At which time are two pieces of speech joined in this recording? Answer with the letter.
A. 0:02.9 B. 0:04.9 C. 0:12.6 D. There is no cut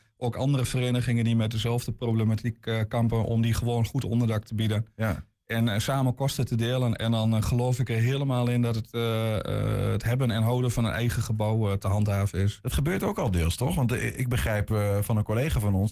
D